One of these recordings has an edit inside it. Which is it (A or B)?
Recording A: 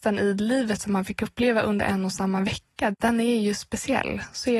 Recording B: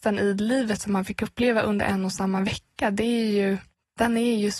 A